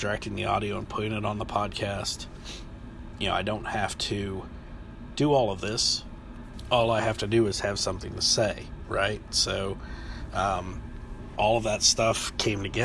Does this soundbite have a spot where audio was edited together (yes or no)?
yes